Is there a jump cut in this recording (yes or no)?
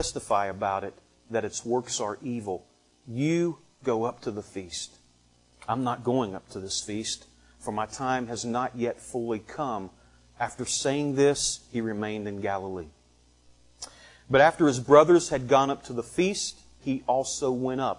yes